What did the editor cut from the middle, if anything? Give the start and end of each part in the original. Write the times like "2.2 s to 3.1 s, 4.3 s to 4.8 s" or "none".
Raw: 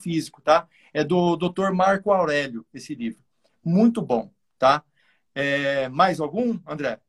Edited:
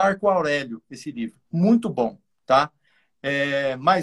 3.3 s to 3.6 s